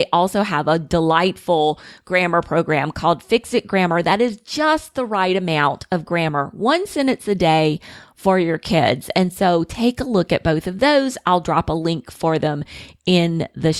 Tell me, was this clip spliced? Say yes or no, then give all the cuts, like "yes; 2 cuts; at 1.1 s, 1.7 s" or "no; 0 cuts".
no; 0 cuts